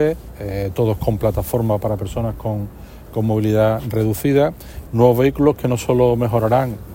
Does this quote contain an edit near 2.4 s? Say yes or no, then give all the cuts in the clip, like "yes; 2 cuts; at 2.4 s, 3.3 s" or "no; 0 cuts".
no; 1 cut; at 4.9 s